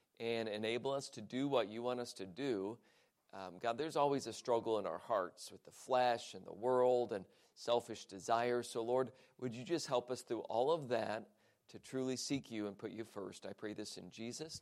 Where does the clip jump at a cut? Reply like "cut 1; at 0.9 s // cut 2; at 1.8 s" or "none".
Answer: none